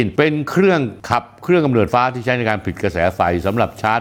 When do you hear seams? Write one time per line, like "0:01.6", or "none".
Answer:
0:01.9